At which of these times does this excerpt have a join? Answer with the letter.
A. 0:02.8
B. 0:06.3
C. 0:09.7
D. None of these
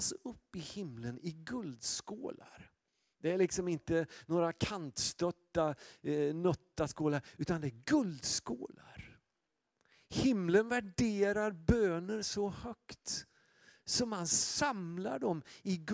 D